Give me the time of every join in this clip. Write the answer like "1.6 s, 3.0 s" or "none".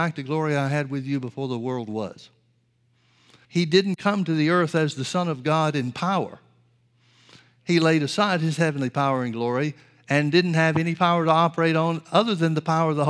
3.4 s